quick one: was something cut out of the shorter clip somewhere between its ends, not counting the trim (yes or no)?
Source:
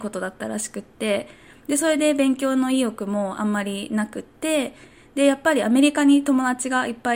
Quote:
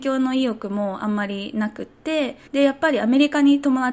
yes